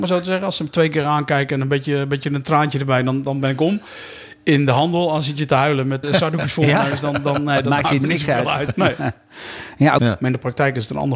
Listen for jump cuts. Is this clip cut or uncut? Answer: cut